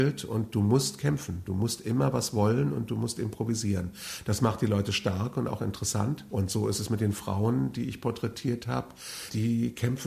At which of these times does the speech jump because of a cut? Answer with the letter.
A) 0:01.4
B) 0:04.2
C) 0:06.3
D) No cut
C